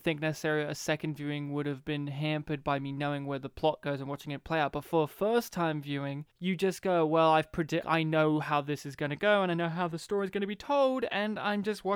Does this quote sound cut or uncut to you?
cut